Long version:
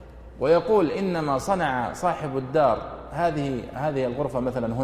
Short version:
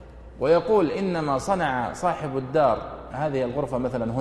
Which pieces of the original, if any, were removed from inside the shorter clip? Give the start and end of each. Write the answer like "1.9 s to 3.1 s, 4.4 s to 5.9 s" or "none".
3.1 s to 3.7 s